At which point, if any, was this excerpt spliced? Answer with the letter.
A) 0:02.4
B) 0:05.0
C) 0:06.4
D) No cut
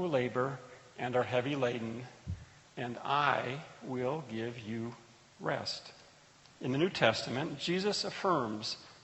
C